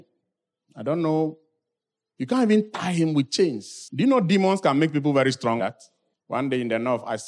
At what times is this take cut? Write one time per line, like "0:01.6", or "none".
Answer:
0:05.6